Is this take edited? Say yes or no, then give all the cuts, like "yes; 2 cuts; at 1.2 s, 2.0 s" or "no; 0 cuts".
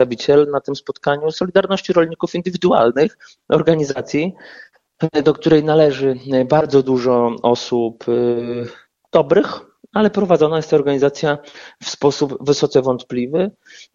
no; 0 cuts